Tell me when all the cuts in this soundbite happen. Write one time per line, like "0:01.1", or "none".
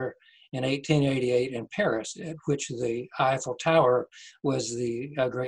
none